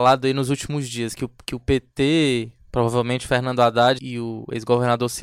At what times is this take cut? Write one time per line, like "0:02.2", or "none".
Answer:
0:04.0